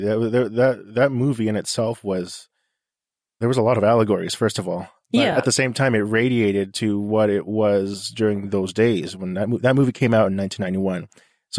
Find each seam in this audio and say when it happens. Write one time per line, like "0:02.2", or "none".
none